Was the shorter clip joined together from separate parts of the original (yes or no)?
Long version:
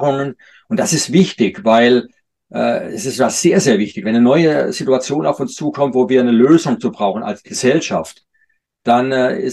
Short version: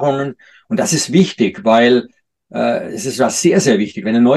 no